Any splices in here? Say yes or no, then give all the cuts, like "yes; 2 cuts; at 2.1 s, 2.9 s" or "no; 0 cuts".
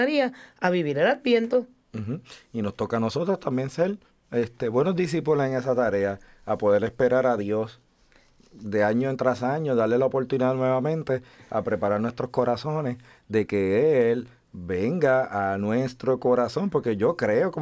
no; 0 cuts